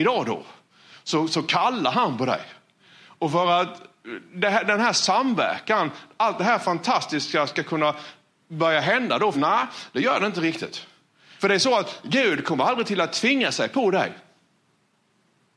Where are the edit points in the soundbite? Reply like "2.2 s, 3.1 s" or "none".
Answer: 9.3 s, 11.4 s

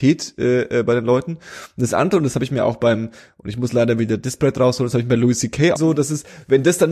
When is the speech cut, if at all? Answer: 5.8 s

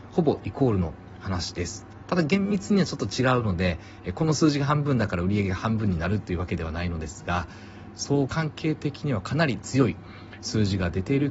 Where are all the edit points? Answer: 8.3 s

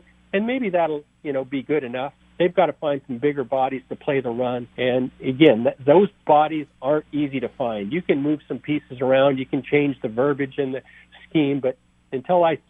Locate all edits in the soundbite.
2.2 s, 4.7 s

